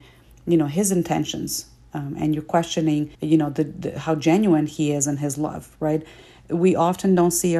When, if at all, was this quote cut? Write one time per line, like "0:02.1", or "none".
0:03.1